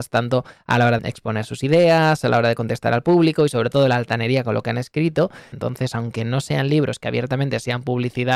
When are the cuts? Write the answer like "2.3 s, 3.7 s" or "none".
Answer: 1.0 s, 5.5 s